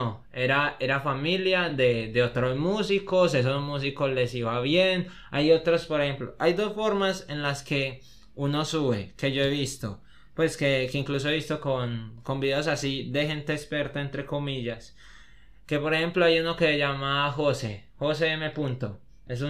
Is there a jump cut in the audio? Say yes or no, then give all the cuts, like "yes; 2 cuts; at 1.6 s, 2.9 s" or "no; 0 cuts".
no; 0 cuts